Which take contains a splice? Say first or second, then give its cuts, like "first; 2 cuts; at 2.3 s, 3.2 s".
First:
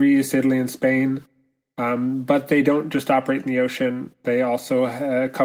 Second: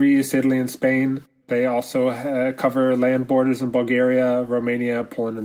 second; 1 cut; at 1.4 s